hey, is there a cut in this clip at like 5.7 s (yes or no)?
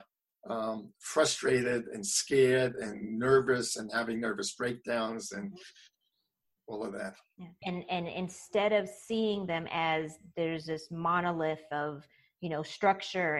no